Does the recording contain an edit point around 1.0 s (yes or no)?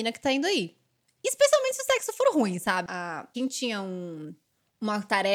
no